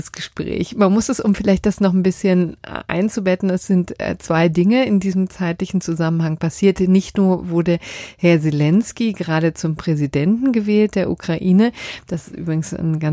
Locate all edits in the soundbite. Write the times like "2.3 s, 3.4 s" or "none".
none